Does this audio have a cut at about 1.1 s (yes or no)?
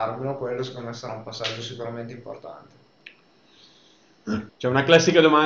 no